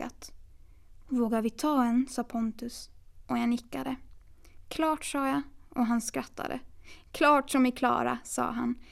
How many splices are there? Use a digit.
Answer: 0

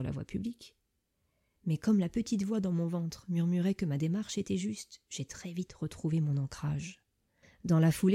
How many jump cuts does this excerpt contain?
0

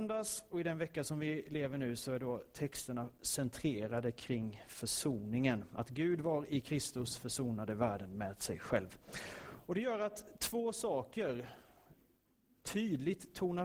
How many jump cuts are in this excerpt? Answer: 0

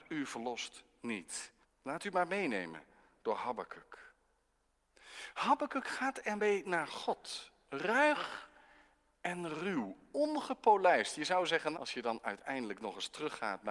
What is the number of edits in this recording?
2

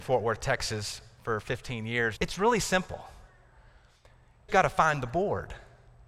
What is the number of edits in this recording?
2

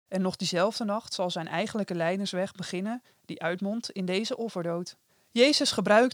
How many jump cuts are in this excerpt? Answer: 0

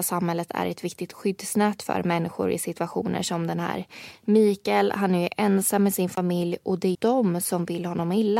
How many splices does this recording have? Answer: 1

